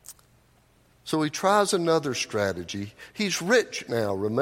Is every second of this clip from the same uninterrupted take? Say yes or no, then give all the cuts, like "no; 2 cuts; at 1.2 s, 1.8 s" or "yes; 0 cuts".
no; 1 cut; at 0.9 s